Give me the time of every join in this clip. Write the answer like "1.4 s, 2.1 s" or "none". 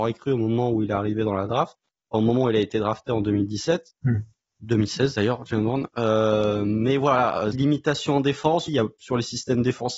7.5 s, 8.7 s